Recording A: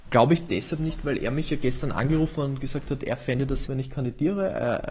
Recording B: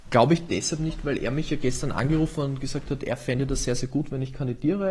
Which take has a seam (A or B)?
A